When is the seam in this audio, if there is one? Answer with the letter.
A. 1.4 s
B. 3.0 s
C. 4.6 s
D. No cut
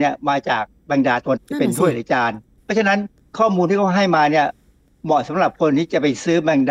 A